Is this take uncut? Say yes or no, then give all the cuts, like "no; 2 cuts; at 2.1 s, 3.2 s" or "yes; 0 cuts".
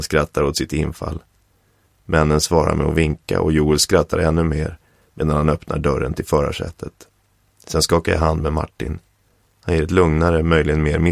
no; 1 cut; at 7.5 s